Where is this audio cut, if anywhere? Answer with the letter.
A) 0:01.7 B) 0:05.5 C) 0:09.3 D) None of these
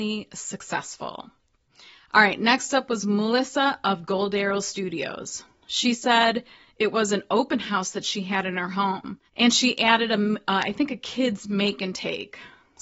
C